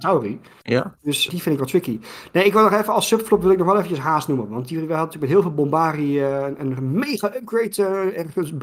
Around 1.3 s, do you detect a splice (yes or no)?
yes